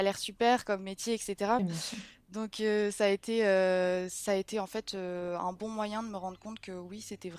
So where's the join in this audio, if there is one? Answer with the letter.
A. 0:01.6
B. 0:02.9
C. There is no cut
A